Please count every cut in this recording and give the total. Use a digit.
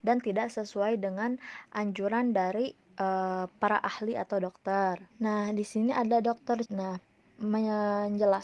2